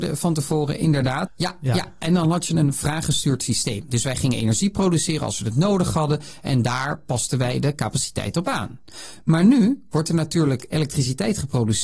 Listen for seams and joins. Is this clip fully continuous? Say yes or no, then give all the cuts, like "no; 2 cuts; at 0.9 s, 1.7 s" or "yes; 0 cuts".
no; 1 cut; at 1.3 s